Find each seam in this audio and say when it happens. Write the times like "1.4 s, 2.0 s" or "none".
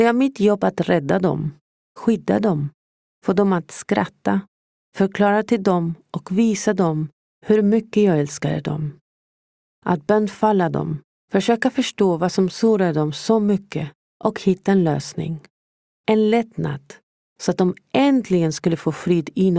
11.2 s